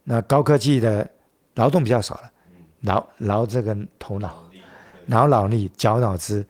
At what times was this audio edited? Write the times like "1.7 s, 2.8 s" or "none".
none